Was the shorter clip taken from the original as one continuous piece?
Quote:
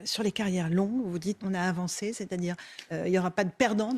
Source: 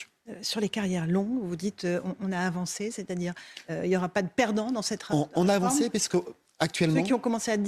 no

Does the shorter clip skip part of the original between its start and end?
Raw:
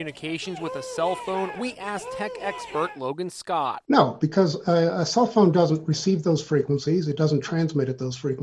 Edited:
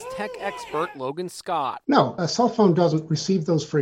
yes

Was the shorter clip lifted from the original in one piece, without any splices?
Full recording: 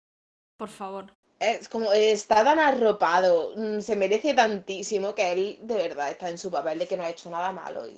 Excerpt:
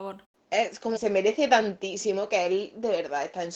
no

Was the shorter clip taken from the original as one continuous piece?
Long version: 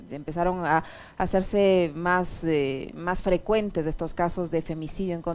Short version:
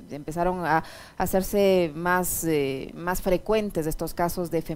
yes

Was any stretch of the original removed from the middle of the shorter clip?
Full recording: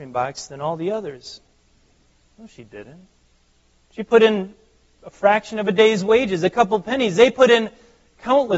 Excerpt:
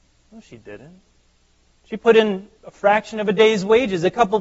yes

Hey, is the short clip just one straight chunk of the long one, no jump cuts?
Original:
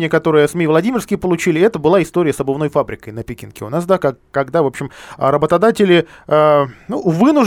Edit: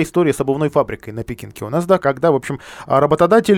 no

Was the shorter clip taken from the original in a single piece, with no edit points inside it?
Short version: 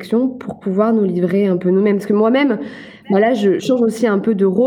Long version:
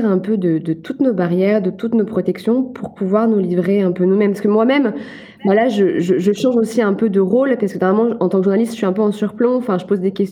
no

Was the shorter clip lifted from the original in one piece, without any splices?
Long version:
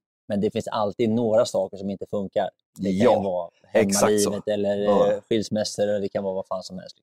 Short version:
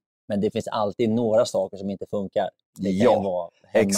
yes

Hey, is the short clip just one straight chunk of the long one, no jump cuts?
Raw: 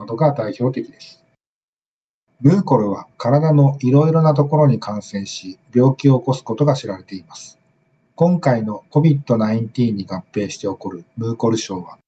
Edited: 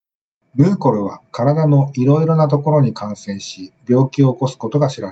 yes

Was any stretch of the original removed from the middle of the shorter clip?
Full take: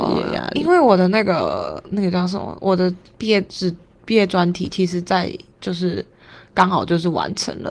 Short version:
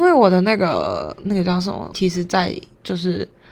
yes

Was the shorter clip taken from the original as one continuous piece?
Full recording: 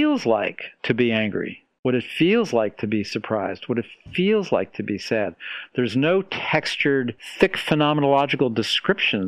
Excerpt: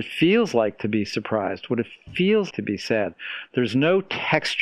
no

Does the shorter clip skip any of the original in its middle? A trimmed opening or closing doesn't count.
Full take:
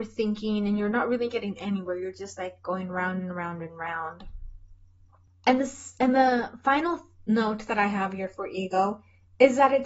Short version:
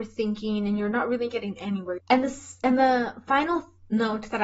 yes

